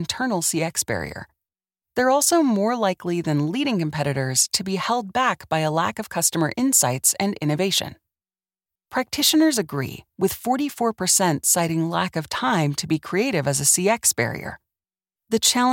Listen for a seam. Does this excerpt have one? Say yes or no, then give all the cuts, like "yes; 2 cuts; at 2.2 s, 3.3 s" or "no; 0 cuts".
yes; 1 cut; at 8.7 s